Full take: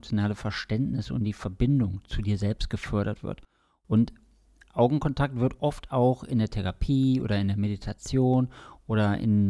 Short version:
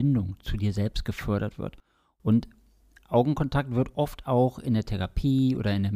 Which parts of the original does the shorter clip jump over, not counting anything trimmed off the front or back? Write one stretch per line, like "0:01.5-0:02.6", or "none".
none